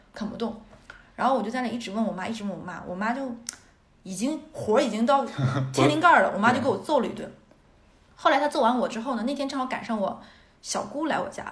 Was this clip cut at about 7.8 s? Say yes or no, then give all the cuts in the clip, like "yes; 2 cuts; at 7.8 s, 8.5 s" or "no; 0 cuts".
no; 0 cuts